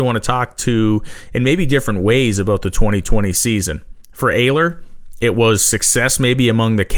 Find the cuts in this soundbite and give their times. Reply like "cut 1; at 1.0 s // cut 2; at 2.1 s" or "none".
none